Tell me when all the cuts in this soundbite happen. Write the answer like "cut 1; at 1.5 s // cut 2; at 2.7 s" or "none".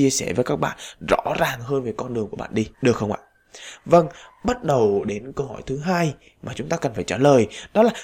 cut 1; at 2.7 s